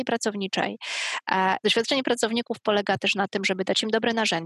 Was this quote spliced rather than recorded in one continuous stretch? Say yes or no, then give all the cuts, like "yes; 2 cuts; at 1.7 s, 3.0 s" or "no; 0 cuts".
yes; 1 cut; at 1.6 s